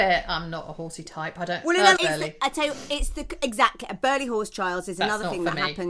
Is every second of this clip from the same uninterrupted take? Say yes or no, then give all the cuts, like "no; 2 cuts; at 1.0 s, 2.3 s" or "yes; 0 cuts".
no; 1 cut; at 2.0 s